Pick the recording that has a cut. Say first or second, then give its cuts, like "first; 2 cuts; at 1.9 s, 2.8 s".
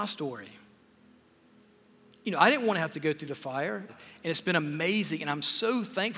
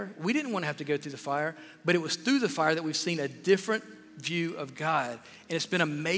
first; 1 cut; at 3.9 s